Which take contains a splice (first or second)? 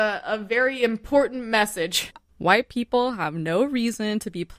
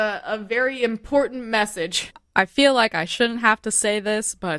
first